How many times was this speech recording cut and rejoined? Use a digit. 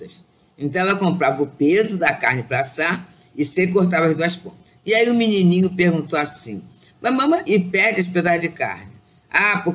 2